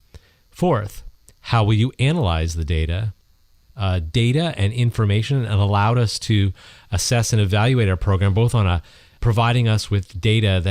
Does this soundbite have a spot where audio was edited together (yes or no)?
yes